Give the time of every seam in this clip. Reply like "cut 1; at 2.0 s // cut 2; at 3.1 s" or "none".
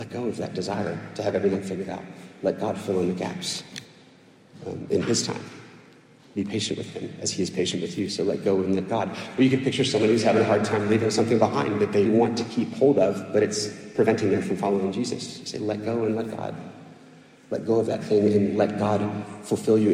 cut 1; at 12.1 s